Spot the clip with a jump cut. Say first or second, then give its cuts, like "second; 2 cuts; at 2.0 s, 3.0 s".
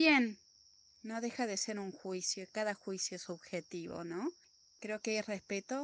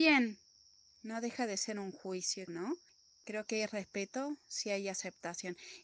second; 1 cut; at 2.5 s